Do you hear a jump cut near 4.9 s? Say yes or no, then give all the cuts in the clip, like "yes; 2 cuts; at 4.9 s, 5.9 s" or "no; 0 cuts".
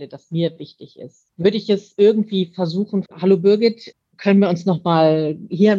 no; 2 cuts; at 1.3 s, 3.1 s